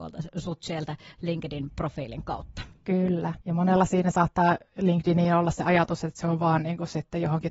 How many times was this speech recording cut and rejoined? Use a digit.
1